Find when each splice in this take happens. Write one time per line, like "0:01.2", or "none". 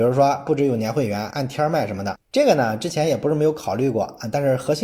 0:01.3